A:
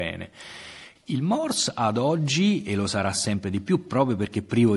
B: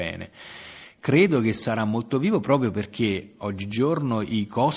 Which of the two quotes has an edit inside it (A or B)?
A